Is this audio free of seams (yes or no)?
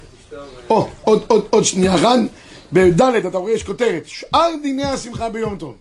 yes